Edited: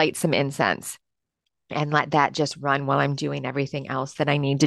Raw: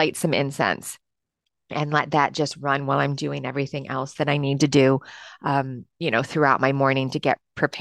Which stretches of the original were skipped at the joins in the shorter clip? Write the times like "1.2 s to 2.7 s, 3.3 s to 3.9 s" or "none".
none